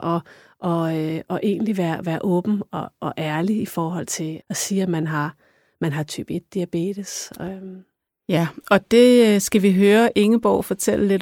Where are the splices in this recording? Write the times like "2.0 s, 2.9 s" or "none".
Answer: 3.0 s, 4.4 s